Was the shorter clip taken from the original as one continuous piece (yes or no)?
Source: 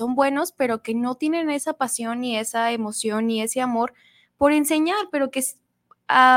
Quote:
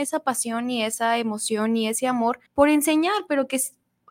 no